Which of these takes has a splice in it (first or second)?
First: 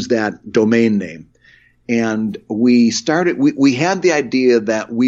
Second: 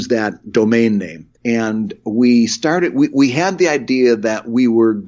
second